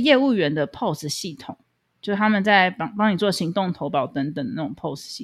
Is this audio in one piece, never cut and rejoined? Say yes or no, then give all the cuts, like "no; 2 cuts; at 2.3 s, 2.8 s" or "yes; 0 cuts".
yes; 0 cuts